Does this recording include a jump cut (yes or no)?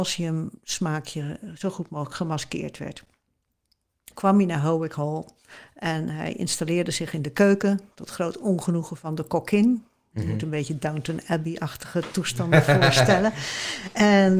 yes